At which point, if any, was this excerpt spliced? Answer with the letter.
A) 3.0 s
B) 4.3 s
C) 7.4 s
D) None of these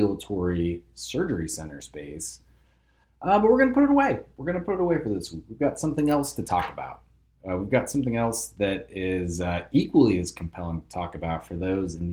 A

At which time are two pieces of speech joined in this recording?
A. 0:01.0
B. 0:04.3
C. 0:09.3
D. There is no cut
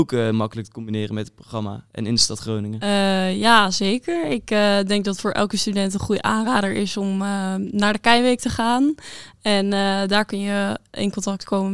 D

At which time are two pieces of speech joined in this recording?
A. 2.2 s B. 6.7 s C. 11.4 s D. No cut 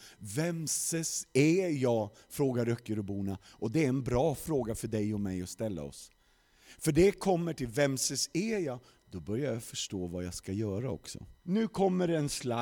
C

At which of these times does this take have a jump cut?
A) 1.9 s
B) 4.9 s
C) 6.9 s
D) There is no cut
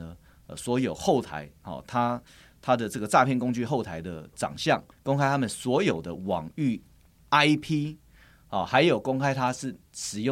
B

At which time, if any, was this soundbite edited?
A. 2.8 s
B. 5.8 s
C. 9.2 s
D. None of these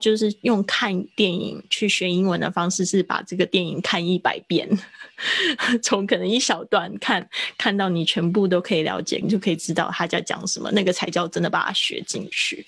C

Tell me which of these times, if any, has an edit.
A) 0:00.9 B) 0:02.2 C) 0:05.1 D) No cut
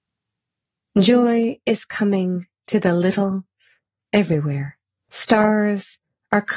C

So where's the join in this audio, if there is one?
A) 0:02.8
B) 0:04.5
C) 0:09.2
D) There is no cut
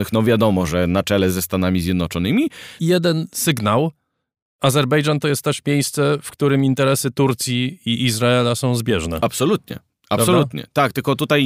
A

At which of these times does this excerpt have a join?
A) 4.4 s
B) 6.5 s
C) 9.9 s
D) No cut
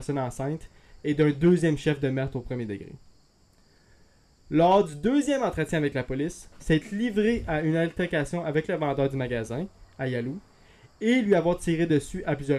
B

